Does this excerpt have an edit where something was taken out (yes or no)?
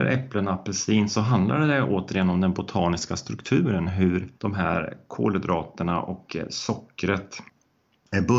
yes